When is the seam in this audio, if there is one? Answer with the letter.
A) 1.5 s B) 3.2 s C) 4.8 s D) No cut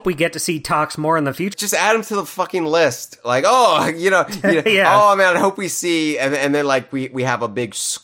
A